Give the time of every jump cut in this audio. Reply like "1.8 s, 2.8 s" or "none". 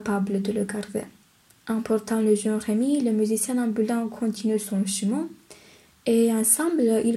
1.6 s